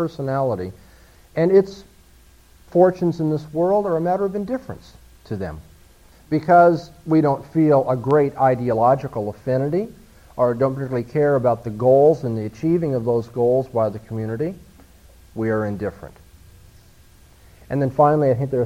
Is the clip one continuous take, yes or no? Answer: no